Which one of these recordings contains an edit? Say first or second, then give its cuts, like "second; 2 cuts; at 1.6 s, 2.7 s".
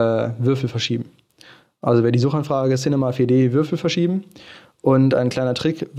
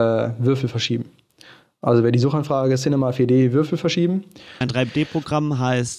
second; 1 cut; at 4.6 s